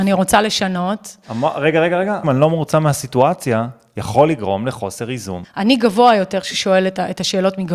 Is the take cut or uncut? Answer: cut